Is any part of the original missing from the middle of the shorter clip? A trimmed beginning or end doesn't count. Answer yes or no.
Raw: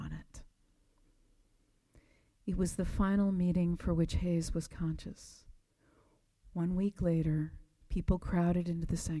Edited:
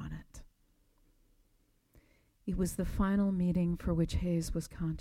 no